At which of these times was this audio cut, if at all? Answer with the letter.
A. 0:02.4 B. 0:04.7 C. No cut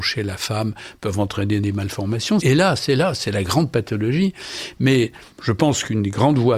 A